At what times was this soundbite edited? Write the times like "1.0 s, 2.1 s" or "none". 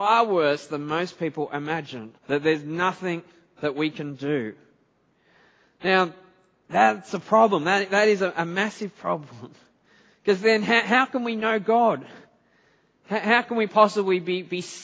2.2 s